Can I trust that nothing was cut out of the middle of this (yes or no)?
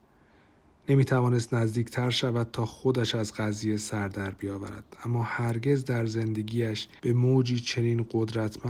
no